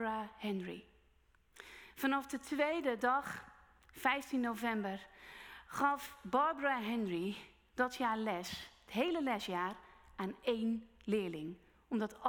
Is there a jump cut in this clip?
no; 0 cuts

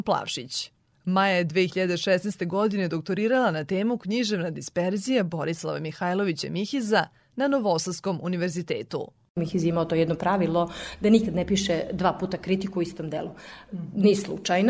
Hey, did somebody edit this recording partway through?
no; 0 cuts

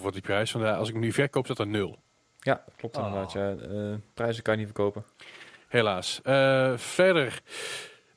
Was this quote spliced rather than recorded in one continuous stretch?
no; 0 cuts

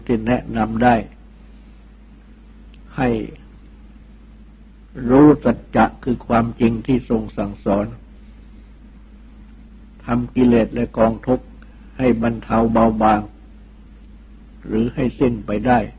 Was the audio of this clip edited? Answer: no; 0 cuts

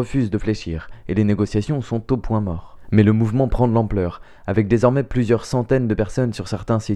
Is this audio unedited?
yes; 0 cuts

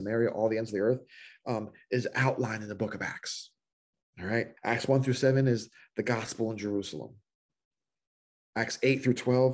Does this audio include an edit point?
yes; 1 cut; at 4.6 s

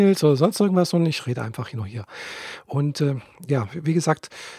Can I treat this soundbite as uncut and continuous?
yes; 0 cuts

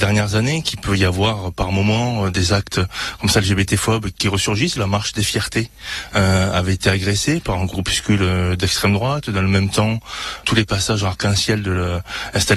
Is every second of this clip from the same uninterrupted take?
no; 1 cut; at 4.8 s

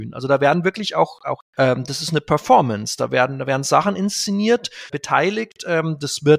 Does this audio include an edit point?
yes; 2 cuts; at 1.5 s, 4.9 s

